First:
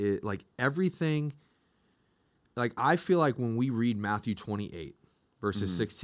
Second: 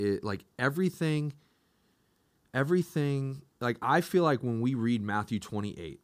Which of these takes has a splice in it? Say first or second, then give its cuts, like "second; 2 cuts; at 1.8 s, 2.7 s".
first; 1 cut; at 2.5 s